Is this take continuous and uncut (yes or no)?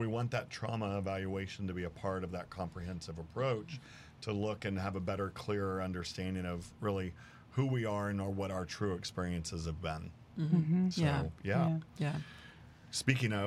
yes